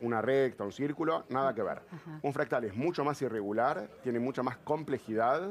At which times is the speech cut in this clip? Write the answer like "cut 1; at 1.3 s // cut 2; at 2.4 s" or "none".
none